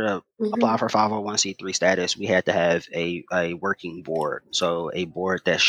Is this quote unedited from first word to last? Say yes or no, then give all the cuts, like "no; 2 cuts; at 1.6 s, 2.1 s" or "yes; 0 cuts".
yes; 0 cuts